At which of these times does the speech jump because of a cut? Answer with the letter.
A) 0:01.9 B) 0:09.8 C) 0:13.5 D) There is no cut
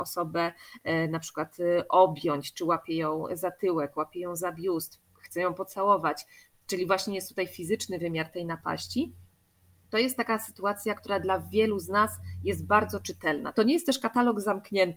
C